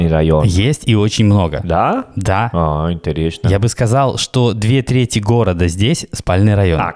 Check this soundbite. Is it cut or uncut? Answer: uncut